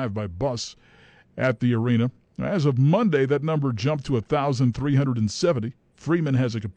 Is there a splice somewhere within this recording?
no; 0 cuts

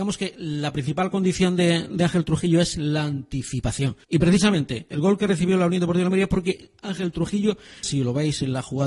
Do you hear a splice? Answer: yes; 2 cuts; at 4.0 s, 7.8 s

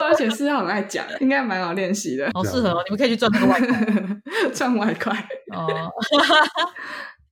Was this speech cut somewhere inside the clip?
yes; 2 cuts; at 1.2 s, 2.3 s

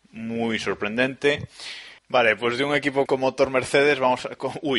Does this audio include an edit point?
yes; 2 cuts; at 2.0 s, 3.1 s

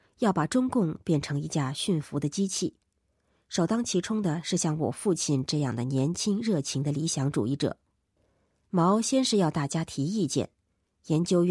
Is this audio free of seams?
yes; 0 cuts

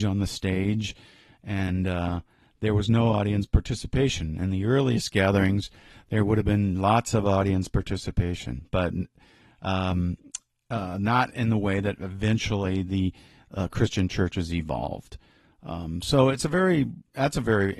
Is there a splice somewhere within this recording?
no; 0 cuts

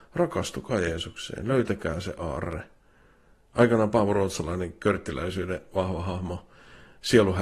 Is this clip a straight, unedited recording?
yes; 0 cuts

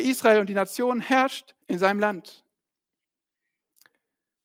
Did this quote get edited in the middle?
yes; 1 cut; at 1.6 s

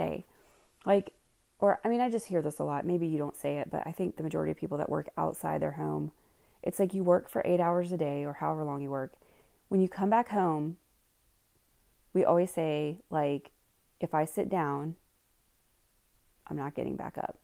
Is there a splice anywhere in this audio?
no; 0 cuts

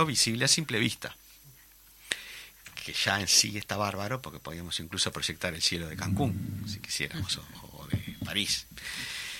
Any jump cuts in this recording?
no; 0 cuts

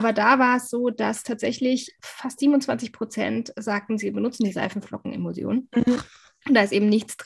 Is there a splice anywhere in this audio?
no; 0 cuts

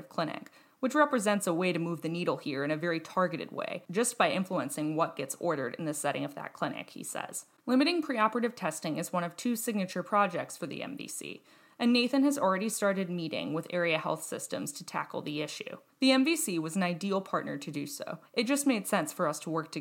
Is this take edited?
yes; 3 cuts; at 7.6 s, 15.9 s, 18.2 s

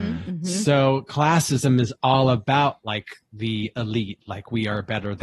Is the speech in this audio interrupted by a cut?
no; 0 cuts

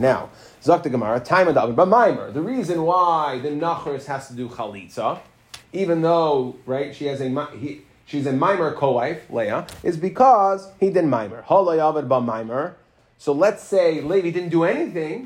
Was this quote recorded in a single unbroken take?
yes; 0 cuts

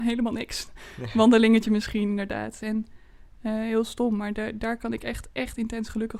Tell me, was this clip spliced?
yes; 1 cut; at 2.6 s

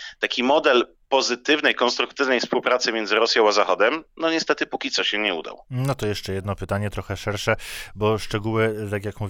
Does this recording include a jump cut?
no; 0 cuts

